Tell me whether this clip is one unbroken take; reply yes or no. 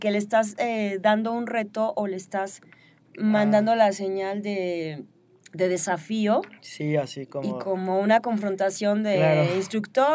yes